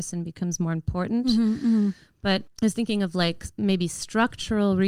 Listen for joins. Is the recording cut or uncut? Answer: uncut